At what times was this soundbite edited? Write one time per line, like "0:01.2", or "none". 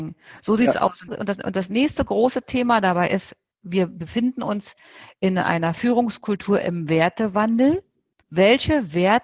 0:01.1
0:08.2